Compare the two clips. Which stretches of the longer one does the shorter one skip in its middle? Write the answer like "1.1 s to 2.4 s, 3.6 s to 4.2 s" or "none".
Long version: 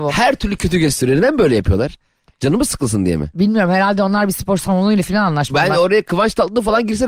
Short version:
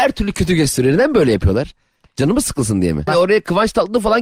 3.3 s to 5.7 s